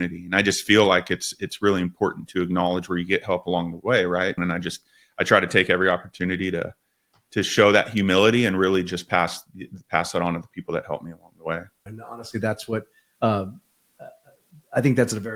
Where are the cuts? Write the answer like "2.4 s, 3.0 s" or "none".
4.4 s, 11.9 s